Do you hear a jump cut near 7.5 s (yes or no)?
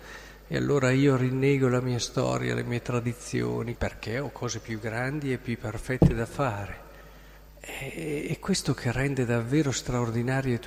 yes